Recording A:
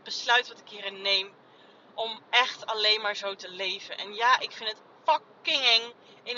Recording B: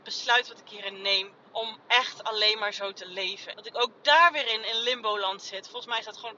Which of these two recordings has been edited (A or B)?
B